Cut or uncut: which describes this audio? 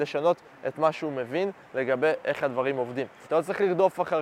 cut